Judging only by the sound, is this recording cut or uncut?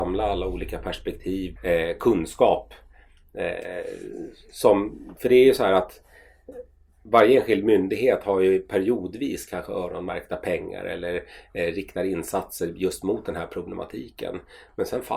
cut